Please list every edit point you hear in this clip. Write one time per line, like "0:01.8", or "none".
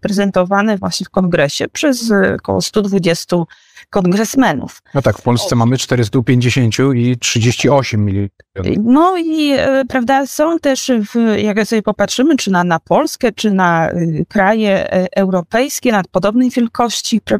0:04.8
0:08.7